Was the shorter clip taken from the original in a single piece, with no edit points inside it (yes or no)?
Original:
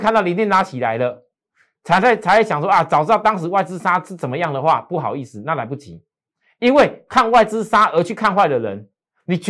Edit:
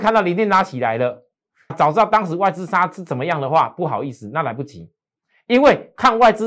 no